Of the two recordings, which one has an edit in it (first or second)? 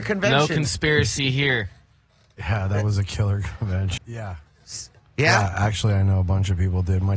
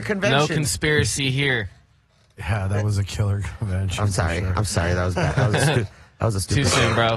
first